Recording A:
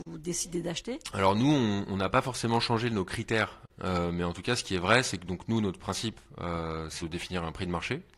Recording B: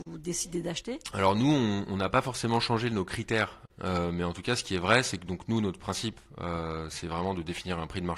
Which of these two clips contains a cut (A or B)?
A